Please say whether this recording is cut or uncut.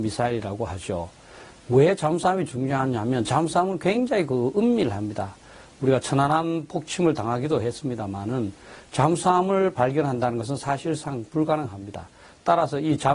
uncut